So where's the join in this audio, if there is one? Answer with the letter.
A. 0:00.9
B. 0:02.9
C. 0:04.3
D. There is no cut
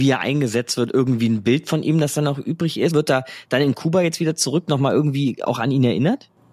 B